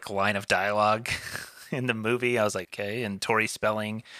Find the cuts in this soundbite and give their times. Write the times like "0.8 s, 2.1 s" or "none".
2.6 s